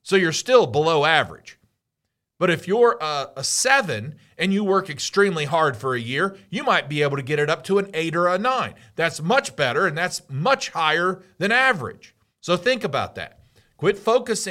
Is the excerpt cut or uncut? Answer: uncut